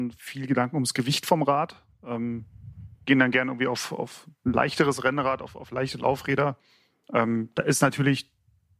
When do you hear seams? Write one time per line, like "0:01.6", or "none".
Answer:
none